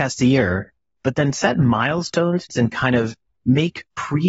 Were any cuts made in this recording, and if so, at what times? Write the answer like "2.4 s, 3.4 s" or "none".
2.5 s